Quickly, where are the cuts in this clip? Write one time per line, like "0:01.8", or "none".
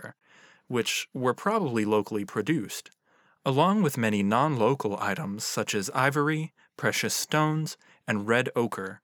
none